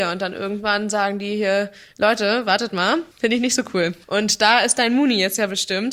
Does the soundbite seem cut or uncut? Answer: cut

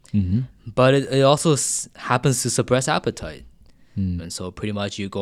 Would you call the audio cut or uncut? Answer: cut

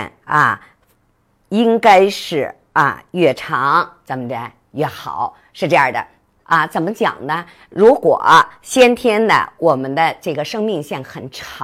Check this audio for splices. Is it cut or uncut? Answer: cut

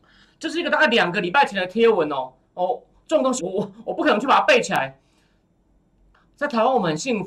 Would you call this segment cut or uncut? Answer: cut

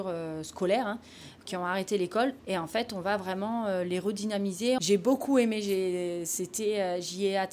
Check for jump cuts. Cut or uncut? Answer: cut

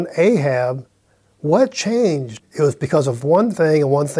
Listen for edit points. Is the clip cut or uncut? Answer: cut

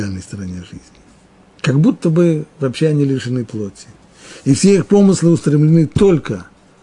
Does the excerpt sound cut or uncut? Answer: uncut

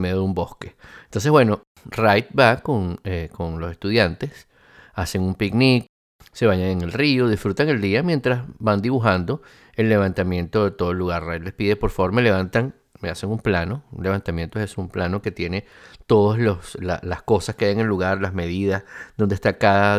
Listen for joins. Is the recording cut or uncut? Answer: uncut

